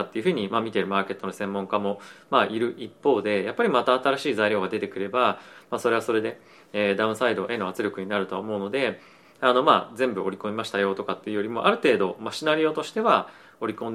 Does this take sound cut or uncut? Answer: uncut